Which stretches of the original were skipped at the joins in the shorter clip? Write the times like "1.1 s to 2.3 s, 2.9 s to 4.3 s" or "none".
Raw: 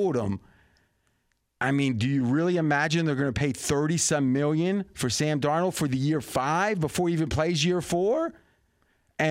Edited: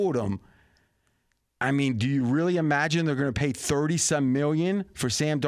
none